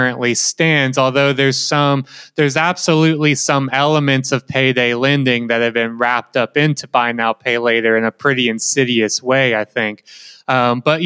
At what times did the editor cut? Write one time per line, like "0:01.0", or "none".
none